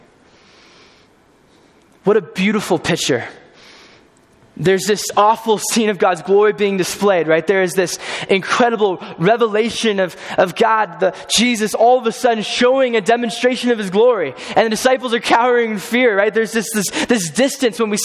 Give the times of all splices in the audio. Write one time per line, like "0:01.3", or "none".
0:05.1